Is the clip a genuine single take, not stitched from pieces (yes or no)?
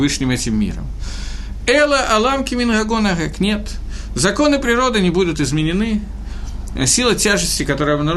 yes